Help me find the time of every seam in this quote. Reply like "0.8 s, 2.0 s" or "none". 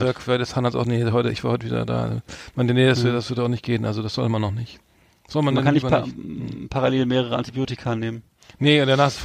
none